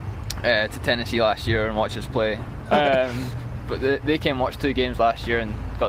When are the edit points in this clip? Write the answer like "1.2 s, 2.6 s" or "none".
2.7 s